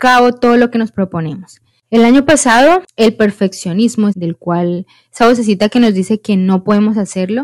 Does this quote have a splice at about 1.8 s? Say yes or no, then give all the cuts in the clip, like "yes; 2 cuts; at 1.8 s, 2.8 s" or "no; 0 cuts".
no; 1 cut; at 4.1 s